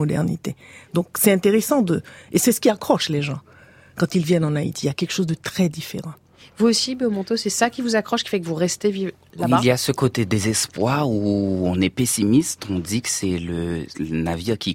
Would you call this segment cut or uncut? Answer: uncut